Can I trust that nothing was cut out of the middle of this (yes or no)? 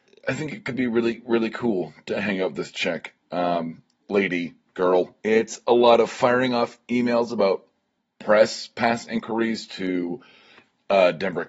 no